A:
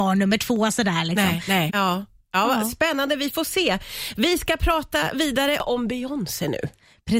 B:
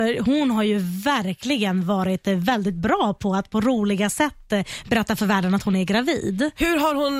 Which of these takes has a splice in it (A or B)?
A